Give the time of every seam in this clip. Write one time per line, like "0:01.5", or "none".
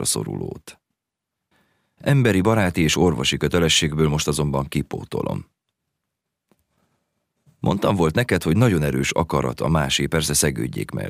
0:02.0